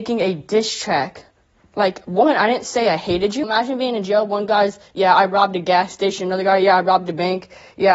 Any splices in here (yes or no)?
yes